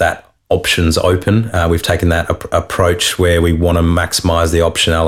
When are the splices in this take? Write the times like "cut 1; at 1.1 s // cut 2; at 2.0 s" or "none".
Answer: none